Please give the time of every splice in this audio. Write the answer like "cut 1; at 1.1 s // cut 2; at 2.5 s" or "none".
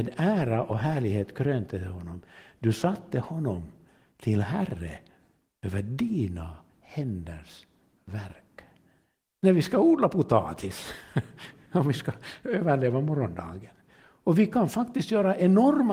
cut 1; at 9.2 s // cut 2; at 13.9 s